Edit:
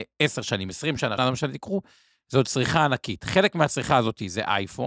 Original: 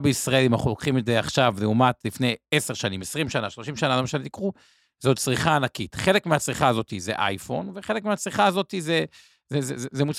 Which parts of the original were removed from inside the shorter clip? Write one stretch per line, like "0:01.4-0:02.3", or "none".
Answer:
0:03.5-0:03.9